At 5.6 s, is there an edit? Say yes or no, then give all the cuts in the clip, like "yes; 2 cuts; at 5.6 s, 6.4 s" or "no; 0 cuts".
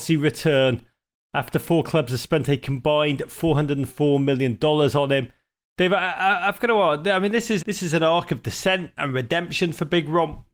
no; 1 cut; at 7.6 s